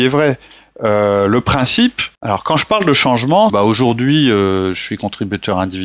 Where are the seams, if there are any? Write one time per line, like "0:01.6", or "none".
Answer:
0:02.1
0:03.5

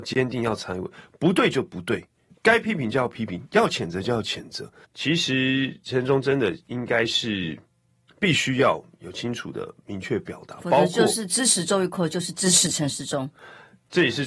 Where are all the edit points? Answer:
0:04.8

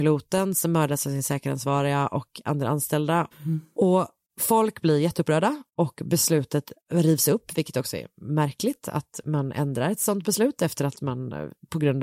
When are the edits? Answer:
0:03.3
0:06.8

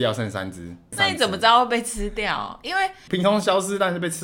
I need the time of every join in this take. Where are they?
0:00.9
0:03.1

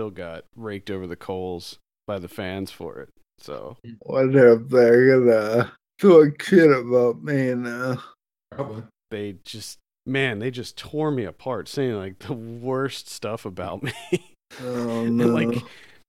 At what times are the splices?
0:09.1

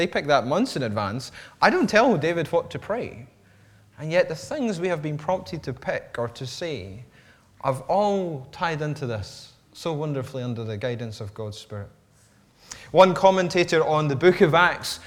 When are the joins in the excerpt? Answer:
none

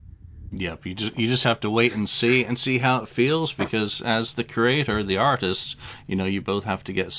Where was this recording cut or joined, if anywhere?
none

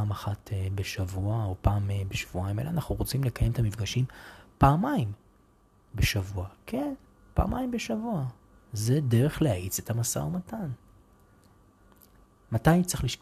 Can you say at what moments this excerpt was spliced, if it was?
none

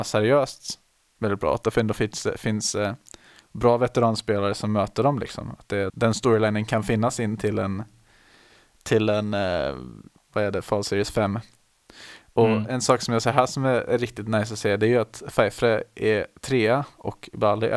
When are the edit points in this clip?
0:05.9

